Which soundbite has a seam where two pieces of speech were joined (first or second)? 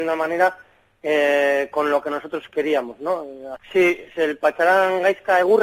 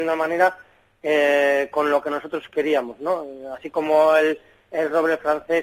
first